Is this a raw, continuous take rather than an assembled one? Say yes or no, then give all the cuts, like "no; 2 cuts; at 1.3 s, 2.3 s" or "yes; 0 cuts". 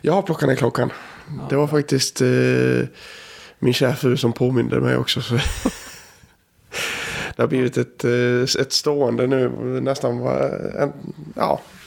yes; 0 cuts